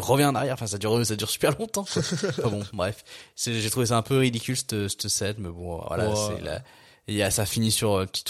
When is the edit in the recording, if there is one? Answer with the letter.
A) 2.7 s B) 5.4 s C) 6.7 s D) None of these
D